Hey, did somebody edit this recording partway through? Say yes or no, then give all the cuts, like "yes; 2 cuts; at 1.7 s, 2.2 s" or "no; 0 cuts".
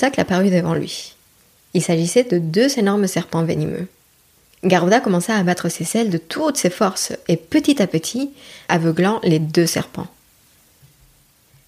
yes; 1 cut; at 8.7 s